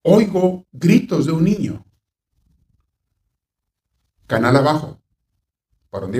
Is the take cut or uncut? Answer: uncut